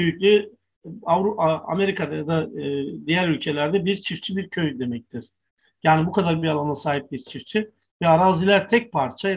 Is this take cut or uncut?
uncut